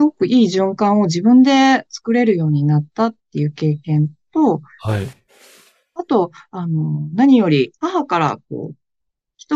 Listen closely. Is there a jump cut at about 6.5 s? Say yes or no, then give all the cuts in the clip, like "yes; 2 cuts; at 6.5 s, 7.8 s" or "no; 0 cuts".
no; 1 cut; at 7.8 s